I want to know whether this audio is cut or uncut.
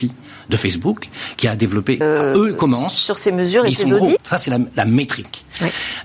cut